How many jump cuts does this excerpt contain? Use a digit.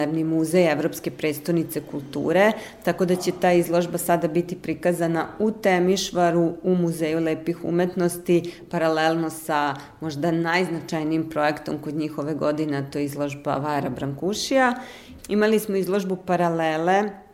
1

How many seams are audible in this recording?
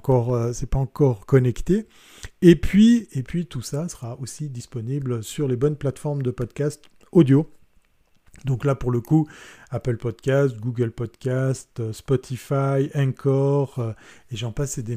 0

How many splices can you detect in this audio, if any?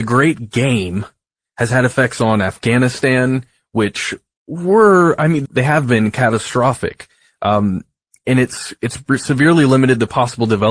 1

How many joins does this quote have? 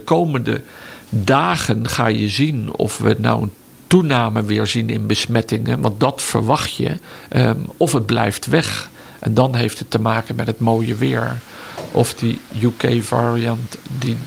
0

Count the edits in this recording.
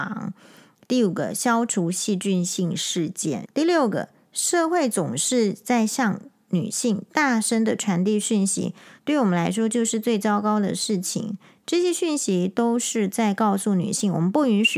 2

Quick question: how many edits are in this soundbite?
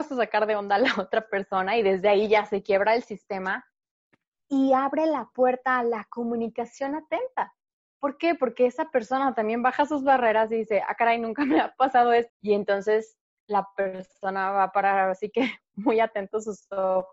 1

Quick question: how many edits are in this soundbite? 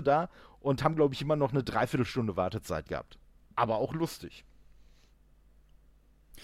1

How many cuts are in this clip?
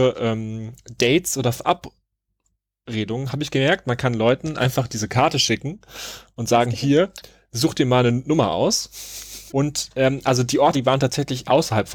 2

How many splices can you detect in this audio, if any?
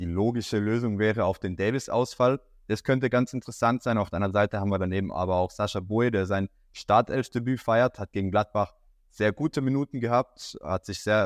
0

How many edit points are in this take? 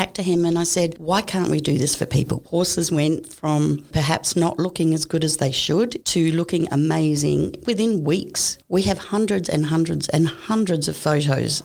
2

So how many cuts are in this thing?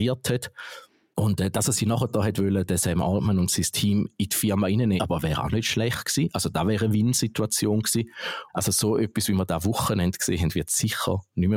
2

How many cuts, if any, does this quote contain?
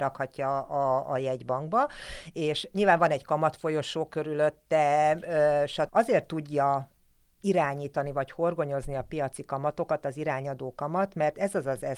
1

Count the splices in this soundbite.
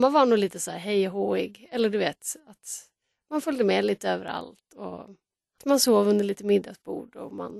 1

